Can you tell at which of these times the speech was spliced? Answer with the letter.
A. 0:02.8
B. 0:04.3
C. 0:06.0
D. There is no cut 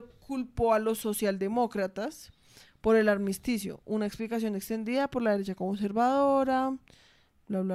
D